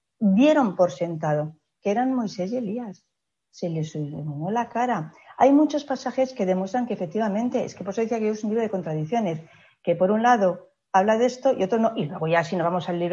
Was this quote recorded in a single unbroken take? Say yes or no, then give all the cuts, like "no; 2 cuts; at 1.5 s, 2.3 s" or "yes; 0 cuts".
yes; 0 cuts